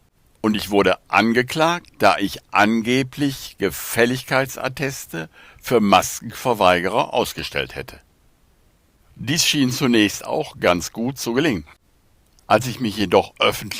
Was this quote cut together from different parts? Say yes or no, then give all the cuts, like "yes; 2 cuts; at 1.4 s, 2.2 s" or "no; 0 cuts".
yes; 1 cut; at 9.1 s